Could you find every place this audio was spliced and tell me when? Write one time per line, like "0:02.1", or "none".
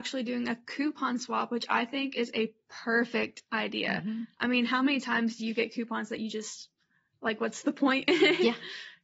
none